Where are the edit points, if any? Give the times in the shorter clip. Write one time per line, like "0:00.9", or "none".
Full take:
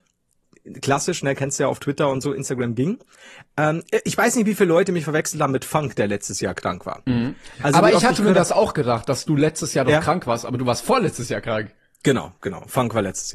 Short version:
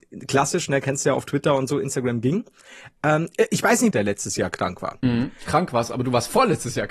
0:03.9
0:05.5